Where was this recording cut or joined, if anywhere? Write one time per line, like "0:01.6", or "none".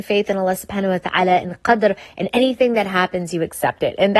none